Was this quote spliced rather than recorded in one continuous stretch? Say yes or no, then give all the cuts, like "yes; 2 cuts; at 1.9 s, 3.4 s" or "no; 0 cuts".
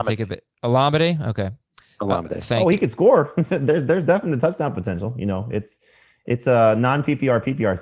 no; 0 cuts